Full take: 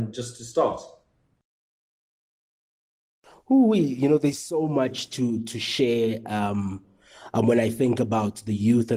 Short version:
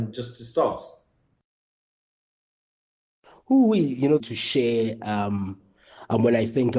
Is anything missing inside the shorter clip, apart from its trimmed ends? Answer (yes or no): yes